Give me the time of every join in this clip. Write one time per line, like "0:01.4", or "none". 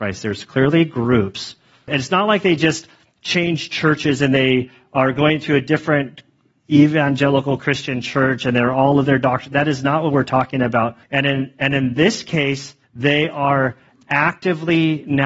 0:01.9
0:11.0
0:12.8